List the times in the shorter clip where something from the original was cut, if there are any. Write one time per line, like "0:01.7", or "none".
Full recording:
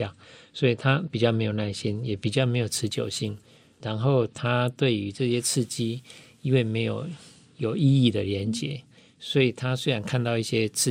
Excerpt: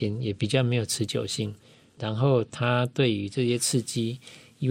none